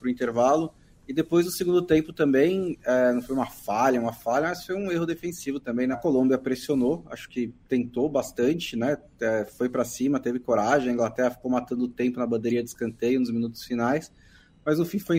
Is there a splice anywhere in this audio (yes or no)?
yes